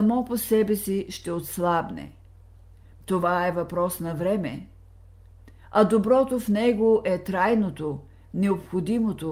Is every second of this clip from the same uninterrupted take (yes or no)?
yes